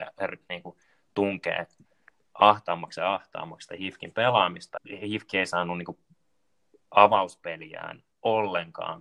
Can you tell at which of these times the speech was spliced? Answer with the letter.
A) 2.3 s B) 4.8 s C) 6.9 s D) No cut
B